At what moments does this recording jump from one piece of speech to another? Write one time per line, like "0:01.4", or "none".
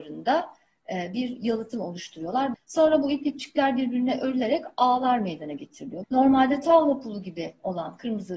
0:02.5
0:06.0